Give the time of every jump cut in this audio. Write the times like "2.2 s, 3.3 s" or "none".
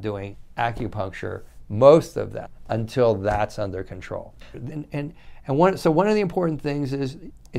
4.5 s